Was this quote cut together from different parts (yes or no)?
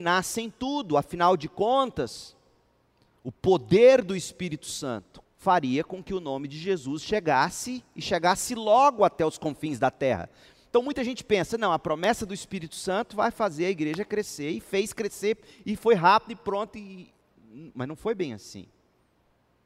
yes